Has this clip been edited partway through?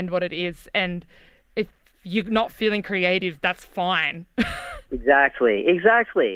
no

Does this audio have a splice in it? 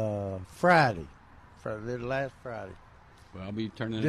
no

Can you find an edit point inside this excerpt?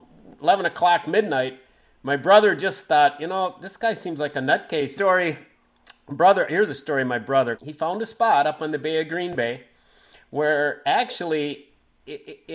yes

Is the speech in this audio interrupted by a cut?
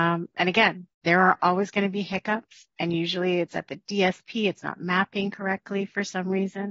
yes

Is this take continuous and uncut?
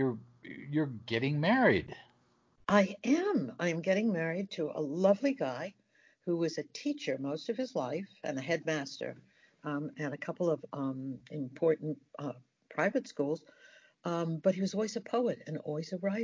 yes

